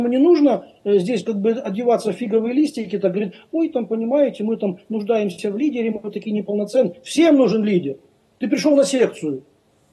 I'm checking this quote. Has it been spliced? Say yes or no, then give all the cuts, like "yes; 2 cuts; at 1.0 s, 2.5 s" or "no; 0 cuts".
no; 0 cuts